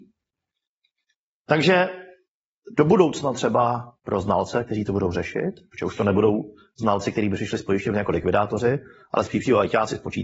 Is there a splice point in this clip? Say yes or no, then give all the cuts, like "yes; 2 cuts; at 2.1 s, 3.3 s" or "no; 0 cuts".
no; 0 cuts